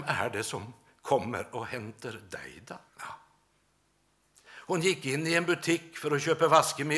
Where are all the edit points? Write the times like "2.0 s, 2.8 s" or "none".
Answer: 2.9 s